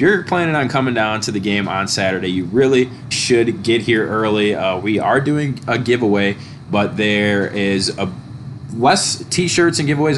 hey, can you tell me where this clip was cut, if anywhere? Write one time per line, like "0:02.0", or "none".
0:03.1